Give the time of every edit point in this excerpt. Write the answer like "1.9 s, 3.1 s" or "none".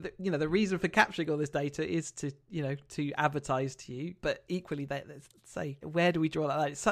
4.2 s, 5.8 s